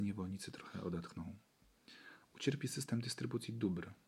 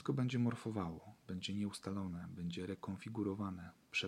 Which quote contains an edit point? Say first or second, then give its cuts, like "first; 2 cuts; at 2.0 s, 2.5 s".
first; 1 cut; at 2.2 s